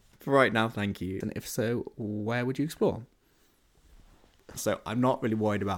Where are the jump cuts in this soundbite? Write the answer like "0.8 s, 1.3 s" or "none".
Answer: 1.2 s, 4.6 s